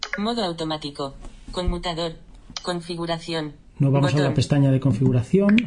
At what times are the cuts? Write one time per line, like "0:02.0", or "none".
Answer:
0:02.5